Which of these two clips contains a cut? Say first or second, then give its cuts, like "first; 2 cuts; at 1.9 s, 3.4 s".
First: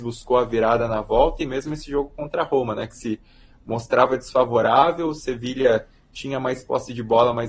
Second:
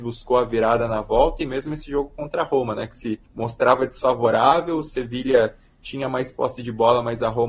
second; 1 cut; at 3.3 s